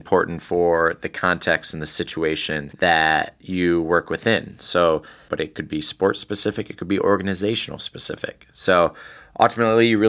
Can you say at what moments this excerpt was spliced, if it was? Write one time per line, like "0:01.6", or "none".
0:05.3